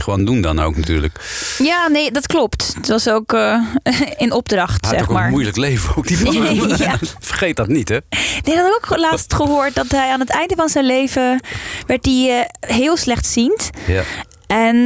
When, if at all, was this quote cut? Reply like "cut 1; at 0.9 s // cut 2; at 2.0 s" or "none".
none